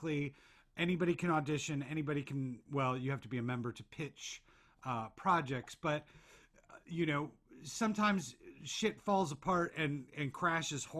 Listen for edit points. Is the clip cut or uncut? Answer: uncut